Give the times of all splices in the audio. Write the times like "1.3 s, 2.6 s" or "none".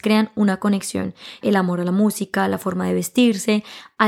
1.4 s